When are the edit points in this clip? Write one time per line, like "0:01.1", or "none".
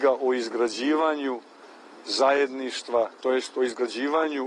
0:03.2